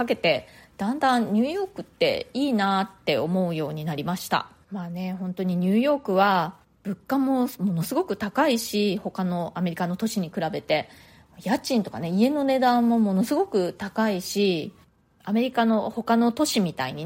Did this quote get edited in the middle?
no; 0 cuts

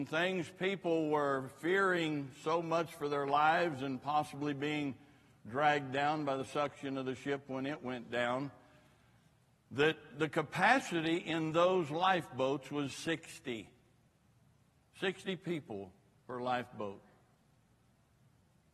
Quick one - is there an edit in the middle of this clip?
no; 0 cuts

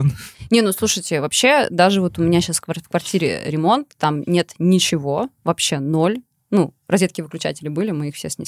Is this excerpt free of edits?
yes; 0 cuts

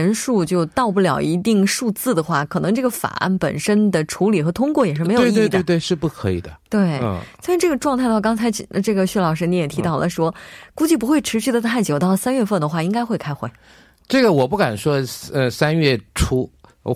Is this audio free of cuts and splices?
yes; 0 cuts

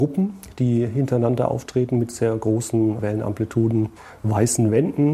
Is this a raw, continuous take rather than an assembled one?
yes; 0 cuts

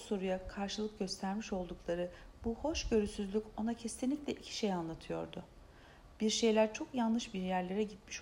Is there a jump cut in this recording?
no; 0 cuts

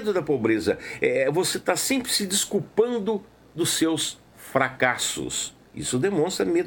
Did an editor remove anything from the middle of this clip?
no; 0 cuts

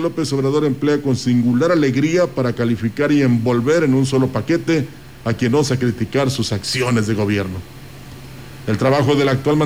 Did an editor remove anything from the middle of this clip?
no; 0 cuts

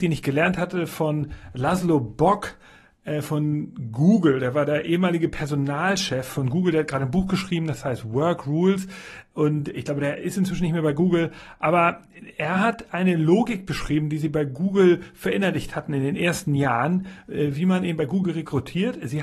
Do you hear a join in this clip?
no; 0 cuts

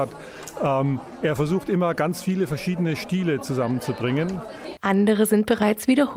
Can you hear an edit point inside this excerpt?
yes; 1 cut; at 4.8 s

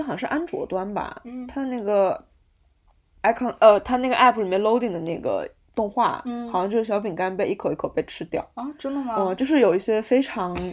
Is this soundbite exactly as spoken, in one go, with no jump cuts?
yes; 0 cuts

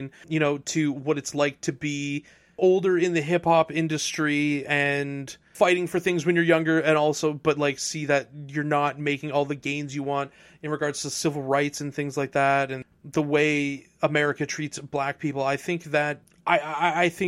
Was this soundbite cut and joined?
no; 0 cuts

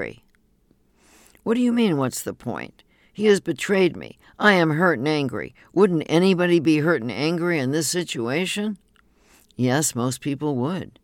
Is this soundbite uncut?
yes; 0 cuts

